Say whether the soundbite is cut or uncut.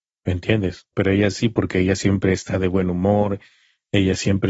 cut